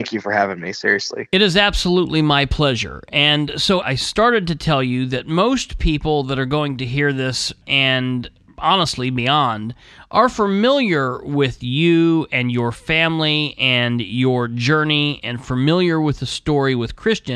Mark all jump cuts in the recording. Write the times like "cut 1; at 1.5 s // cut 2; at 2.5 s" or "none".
cut 1; at 3.8 s // cut 2; at 7.6 s